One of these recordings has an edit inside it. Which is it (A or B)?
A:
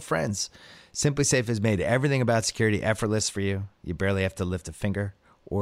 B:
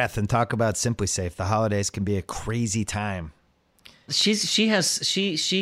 B